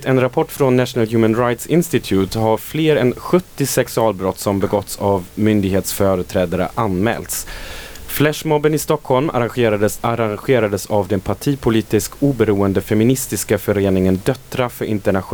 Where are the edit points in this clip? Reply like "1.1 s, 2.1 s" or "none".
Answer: 10.0 s